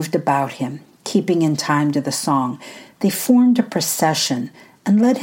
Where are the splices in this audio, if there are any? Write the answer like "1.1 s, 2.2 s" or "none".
none